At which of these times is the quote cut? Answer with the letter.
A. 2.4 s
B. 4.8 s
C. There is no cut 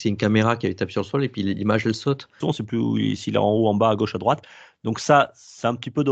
A